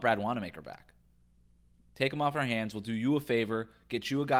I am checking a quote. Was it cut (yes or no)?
no